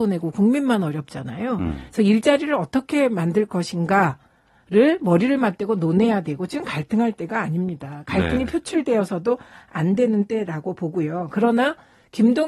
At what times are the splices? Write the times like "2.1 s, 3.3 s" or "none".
none